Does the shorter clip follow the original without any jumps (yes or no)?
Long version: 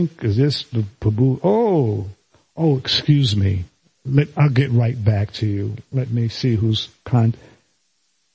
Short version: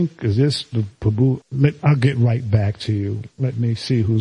no